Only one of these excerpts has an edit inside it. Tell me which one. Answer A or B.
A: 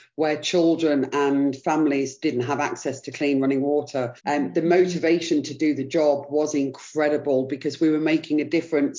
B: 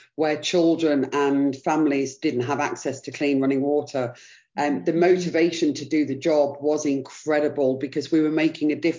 A